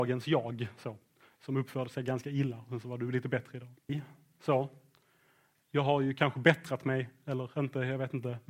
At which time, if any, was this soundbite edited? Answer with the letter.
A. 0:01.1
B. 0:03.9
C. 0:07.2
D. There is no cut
B